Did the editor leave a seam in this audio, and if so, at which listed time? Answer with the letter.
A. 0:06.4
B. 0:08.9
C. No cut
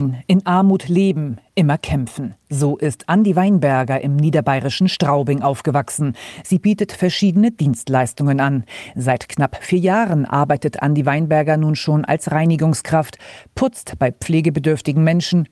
A